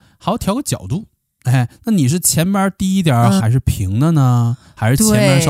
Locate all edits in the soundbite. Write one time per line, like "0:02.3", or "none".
0:03.4

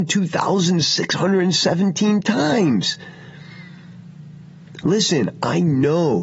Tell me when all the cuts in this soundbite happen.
none

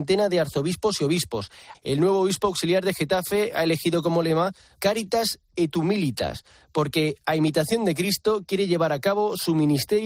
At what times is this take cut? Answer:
0:01.7

